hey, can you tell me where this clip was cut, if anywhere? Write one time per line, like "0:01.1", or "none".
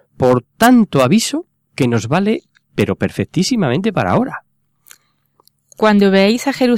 none